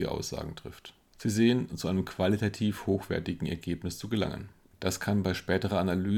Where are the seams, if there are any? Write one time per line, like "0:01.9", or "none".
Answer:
0:01.7
0:04.7

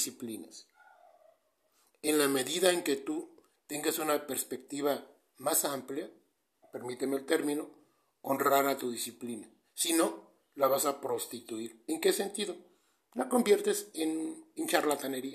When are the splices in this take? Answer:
0:06.6

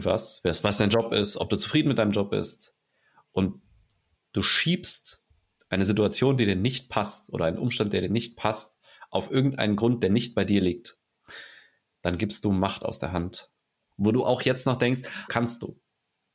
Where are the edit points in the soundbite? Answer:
0:13.9
0:15.3

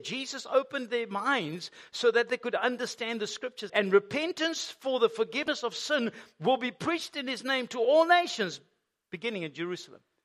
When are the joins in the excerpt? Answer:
0:03.7

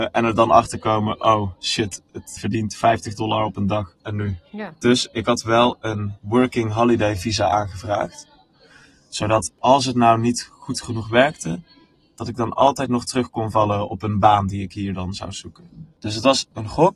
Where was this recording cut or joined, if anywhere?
0:02.4

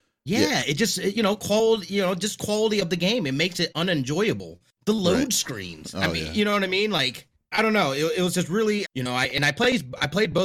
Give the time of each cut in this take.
0:07.5
0:08.8

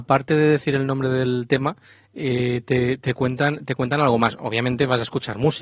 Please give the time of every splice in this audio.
none

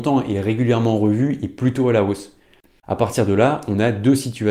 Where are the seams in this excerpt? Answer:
0:02.7

